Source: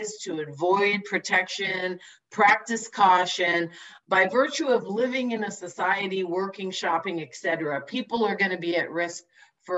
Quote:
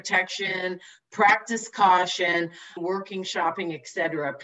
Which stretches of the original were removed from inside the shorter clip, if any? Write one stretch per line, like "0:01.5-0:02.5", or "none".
0:04.0-0:06.2